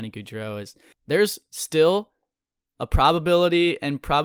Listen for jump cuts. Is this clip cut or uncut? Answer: cut